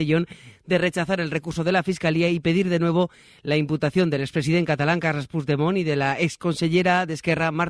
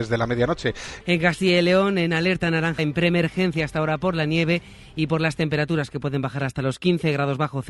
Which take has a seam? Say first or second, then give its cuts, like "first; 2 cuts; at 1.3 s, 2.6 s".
second; 2 cuts; at 1.0 s, 2.8 s